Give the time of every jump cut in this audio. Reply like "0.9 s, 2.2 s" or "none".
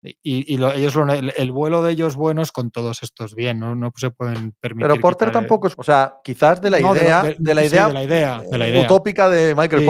5.7 s